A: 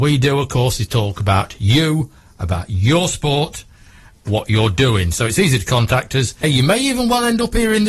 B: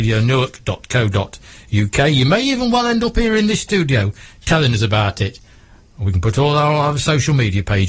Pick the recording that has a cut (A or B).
A